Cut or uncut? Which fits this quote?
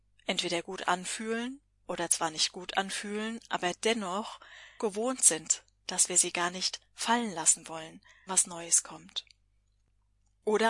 cut